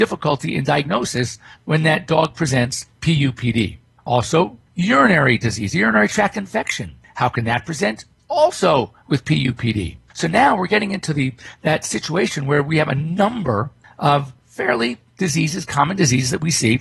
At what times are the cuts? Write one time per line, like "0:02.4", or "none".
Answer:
0:04.7